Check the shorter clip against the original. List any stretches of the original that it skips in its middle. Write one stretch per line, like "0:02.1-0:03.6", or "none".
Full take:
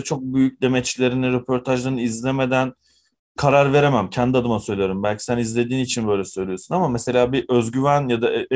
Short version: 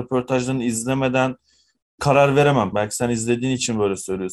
0:04.1-0:05.0